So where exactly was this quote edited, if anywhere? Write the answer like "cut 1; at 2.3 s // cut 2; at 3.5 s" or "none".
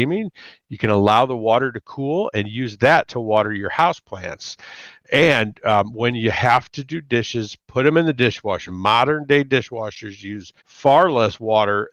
cut 1; at 8.7 s // cut 2; at 10.6 s